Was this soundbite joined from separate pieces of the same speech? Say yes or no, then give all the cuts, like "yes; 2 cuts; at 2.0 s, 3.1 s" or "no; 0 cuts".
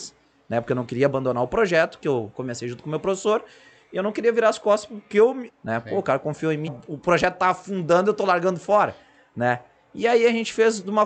yes; 2 cuts; at 5.5 s, 6.7 s